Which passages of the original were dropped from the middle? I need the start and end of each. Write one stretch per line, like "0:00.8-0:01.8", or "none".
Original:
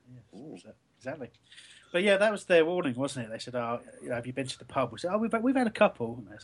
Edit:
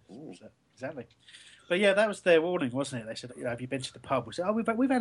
0:03.5-0:03.9